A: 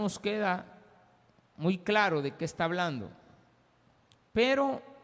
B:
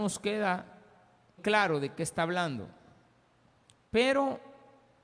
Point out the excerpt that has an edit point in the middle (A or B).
B